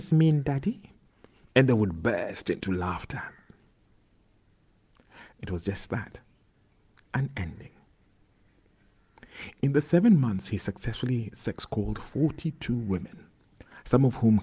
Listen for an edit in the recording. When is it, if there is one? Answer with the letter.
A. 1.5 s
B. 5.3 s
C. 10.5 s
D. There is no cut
B